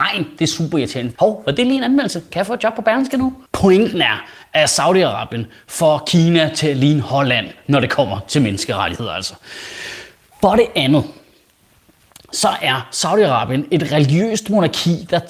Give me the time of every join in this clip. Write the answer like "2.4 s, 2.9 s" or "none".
1.2 s